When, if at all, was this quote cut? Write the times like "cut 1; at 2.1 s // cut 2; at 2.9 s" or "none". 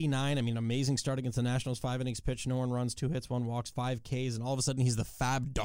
none